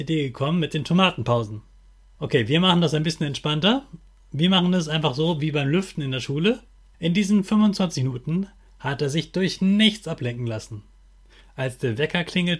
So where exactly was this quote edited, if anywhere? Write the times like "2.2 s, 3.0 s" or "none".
2.2 s, 6.9 s